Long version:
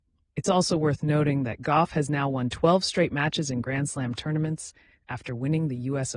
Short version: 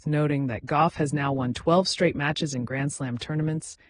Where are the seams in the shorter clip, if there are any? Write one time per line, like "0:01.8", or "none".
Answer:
none